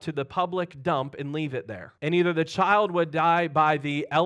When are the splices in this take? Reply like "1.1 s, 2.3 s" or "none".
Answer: 2.0 s